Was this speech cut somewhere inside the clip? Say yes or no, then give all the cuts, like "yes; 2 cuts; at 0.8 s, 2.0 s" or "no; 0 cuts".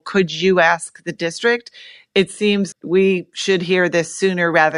yes; 1 cut; at 2.7 s